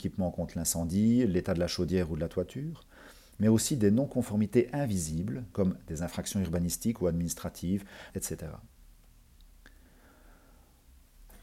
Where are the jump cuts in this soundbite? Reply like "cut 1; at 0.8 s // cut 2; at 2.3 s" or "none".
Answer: cut 1; at 5.5 s // cut 2; at 8.1 s